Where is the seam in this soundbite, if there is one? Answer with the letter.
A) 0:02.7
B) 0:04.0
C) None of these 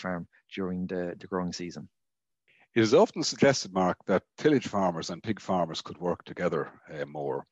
C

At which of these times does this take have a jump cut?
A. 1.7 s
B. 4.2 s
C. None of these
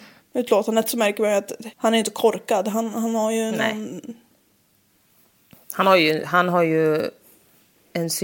A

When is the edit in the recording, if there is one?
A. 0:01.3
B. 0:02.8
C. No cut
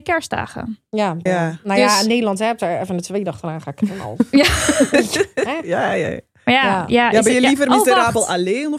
A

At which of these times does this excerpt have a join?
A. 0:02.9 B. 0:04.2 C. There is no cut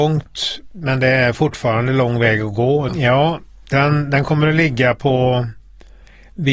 A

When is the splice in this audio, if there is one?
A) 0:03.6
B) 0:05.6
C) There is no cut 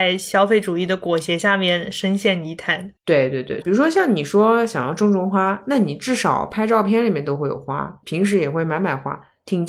A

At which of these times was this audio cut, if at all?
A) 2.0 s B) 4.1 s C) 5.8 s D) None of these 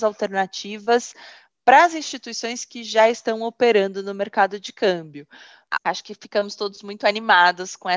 C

